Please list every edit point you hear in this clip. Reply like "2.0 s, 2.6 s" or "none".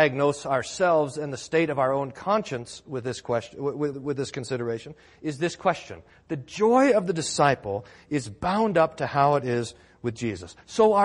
3.9 s, 6.1 s

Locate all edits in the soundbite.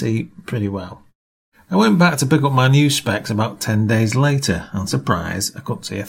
1.5 s, 4.9 s

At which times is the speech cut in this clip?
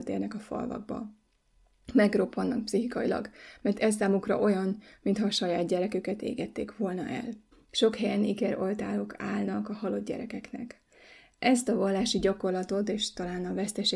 7.5 s

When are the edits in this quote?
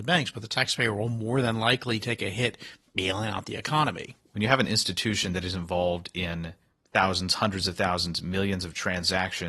none

